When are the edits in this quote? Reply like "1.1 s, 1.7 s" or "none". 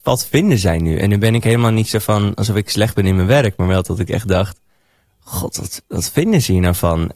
none